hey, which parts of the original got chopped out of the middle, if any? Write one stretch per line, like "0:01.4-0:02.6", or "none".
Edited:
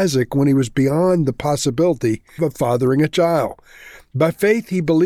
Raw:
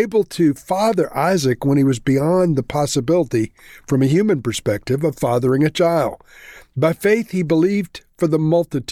0:03.7-0:05.0